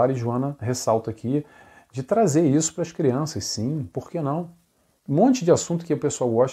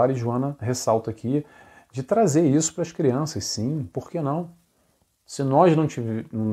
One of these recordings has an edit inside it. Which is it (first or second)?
first